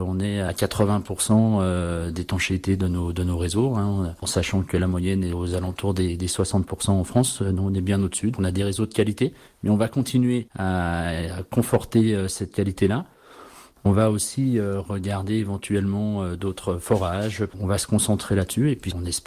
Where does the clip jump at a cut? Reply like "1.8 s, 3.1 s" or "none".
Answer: 8.3 s